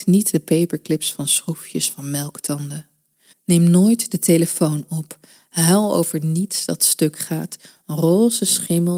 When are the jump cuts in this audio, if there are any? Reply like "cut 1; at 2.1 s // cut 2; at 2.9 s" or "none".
cut 1; at 3.3 s